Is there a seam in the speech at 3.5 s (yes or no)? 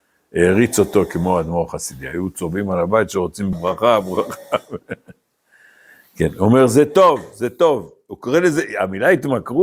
yes